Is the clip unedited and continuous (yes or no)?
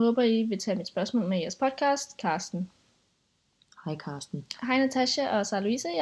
no